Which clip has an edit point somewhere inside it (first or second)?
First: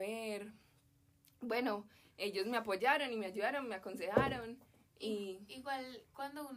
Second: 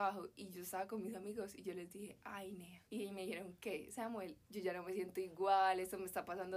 second